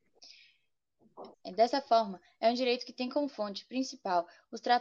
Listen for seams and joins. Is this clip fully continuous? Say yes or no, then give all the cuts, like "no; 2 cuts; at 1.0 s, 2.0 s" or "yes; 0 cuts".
no; 1 cut; at 1.3 s